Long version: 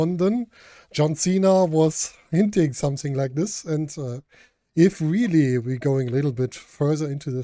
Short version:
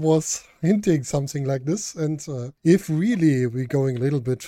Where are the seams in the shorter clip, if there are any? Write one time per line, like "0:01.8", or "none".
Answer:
0:02.6